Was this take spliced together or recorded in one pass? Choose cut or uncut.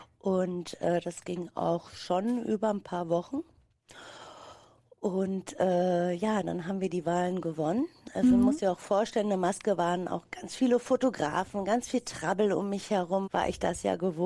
cut